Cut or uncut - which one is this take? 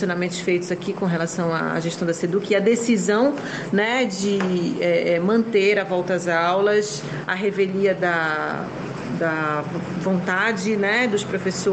uncut